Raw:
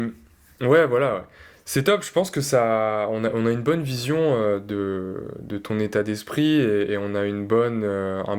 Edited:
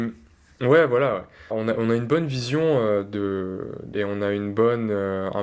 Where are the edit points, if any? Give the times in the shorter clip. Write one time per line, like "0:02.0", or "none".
0:01.5
0:03.9